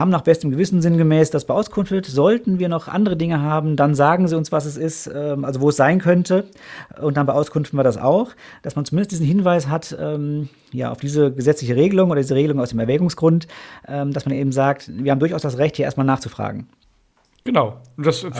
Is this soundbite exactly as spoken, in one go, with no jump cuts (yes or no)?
yes